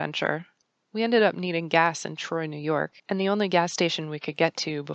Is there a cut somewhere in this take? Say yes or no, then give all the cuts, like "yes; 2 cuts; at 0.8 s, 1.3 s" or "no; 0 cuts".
yes; 1 cut; at 3.0 s